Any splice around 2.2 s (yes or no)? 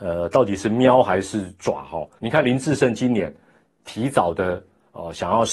yes